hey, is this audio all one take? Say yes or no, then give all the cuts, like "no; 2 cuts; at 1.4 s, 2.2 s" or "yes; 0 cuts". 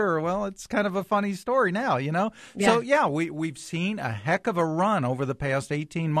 yes; 0 cuts